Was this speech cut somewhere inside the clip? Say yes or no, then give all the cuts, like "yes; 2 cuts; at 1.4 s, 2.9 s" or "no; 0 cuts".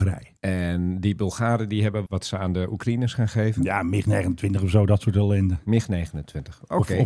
yes; 1 cut; at 2.1 s